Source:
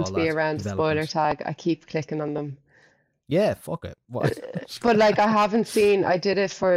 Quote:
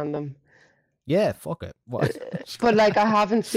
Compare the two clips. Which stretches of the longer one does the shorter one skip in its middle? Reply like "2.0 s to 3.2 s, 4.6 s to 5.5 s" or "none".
none